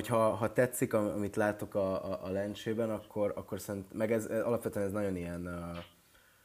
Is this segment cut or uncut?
uncut